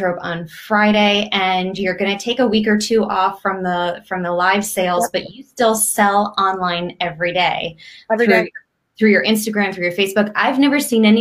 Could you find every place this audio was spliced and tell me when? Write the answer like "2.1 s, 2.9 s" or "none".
none